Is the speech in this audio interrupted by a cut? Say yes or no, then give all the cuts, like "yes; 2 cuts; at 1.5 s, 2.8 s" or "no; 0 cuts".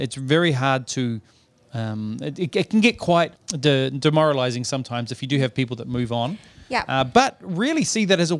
yes; 1 cut; at 3.3 s